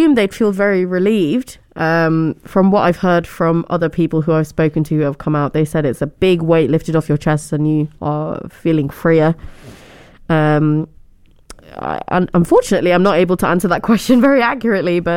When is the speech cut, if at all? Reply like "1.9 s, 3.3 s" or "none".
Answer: none